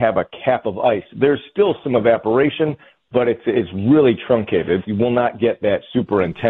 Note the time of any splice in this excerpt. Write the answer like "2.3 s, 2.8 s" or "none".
4.8 s